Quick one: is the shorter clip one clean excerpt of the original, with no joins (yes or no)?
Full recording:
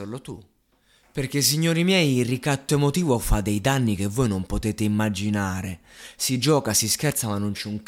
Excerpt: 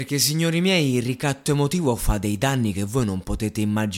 yes